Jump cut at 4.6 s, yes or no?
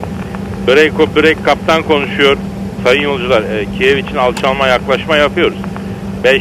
no